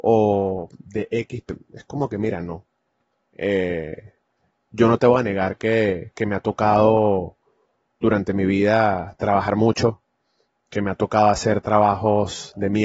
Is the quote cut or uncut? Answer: uncut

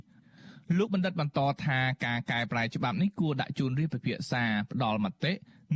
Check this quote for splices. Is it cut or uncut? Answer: uncut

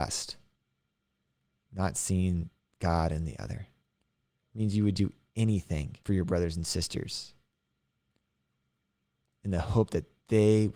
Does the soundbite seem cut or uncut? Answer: cut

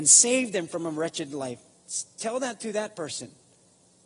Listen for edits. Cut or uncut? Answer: uncut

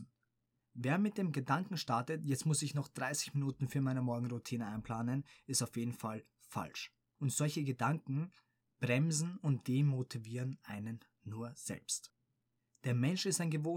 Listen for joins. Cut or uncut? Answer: cut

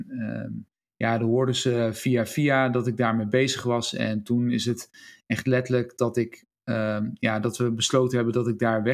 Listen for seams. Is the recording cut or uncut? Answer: uncut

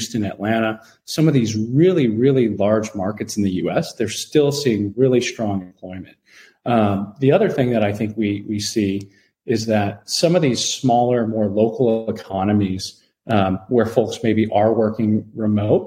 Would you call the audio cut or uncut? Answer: uncut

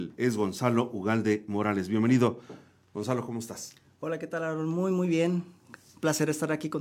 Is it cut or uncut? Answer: uncut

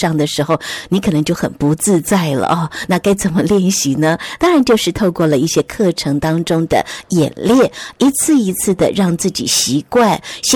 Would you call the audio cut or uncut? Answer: uncut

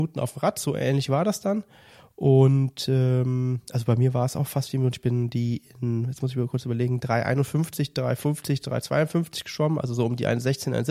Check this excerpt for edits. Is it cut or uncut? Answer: uncut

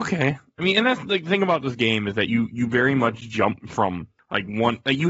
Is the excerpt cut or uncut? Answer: uncut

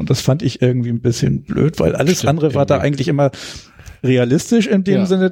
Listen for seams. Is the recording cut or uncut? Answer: uncut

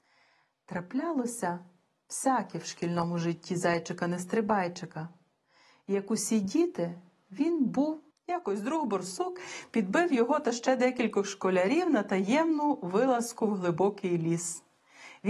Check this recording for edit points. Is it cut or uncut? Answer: cut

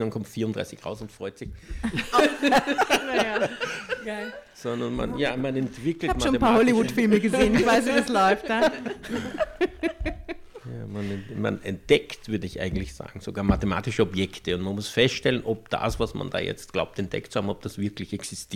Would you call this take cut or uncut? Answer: cut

